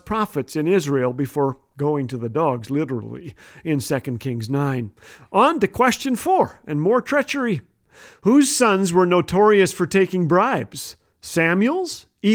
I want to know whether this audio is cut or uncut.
uncut